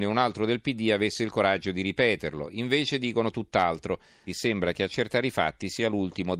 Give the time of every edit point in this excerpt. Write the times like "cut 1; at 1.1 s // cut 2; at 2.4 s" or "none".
cut 1; at 4.3 s